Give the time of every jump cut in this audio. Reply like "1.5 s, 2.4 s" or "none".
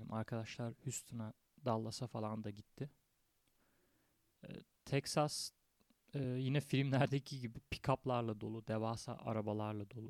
none